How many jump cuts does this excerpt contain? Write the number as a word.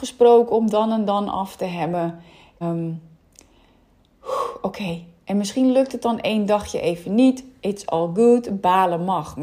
one